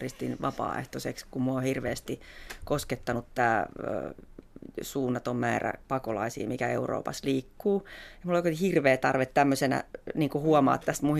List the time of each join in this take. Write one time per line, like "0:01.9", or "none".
none